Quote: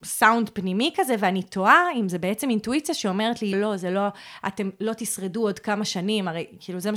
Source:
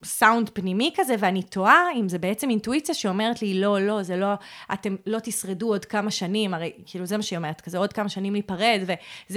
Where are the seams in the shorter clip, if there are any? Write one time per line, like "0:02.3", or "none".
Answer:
0:03.5